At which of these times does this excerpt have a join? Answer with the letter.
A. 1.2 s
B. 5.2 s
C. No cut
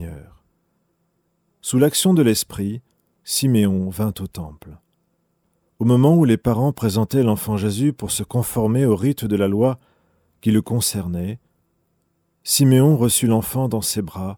C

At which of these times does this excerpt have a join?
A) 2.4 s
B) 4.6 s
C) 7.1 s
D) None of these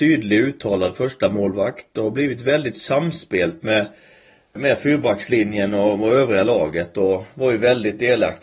B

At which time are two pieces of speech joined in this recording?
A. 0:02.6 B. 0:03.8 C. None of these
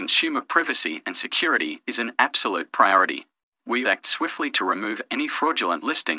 B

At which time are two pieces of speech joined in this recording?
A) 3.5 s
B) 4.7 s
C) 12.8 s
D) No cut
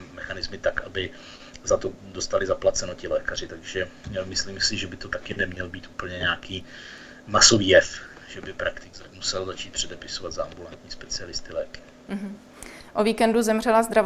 D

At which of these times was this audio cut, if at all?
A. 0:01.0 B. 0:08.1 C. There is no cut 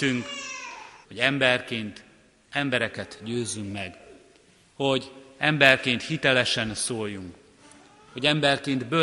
A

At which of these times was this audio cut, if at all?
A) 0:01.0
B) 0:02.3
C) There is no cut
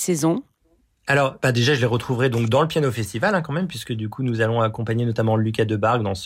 C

